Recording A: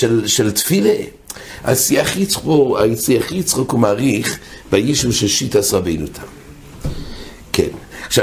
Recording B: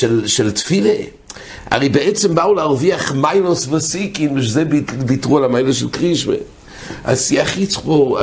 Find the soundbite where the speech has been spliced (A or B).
A